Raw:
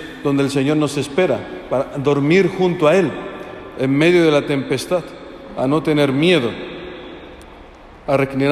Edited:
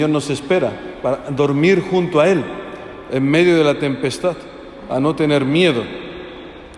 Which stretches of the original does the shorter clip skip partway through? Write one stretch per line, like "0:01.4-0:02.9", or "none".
none